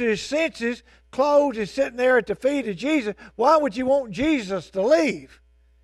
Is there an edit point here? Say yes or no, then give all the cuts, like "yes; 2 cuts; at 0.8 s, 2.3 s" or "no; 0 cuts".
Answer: no; 0 cuts